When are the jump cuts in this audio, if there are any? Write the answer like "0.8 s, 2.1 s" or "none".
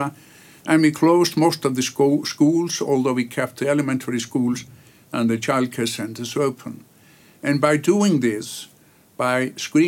none